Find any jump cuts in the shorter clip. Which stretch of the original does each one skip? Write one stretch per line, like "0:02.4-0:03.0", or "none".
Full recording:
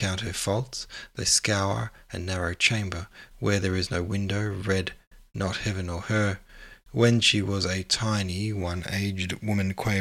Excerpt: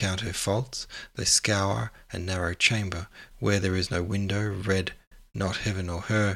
none